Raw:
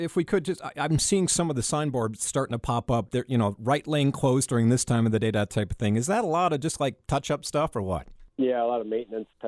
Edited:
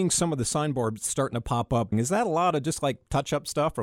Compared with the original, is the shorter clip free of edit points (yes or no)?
no